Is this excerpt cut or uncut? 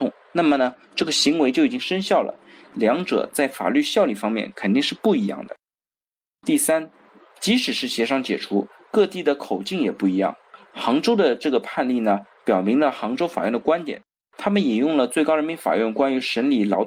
cut